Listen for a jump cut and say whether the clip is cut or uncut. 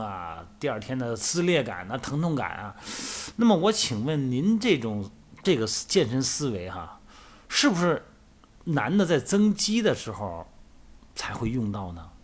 uncut